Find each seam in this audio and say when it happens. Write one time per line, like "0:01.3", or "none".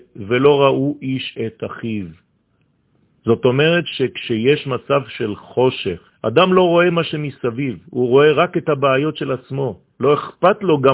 0:06.1